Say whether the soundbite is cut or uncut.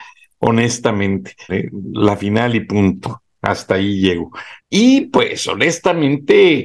cut